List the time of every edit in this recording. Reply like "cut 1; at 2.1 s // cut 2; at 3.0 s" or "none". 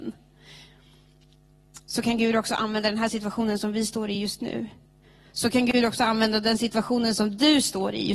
none